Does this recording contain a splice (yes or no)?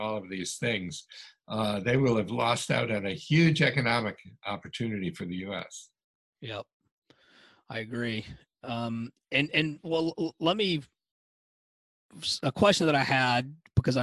no